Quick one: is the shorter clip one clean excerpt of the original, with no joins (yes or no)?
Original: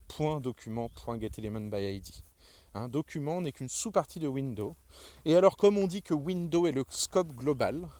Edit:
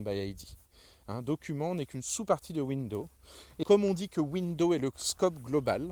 no